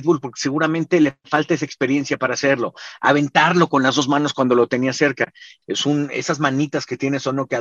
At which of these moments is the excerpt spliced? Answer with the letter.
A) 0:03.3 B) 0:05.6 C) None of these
B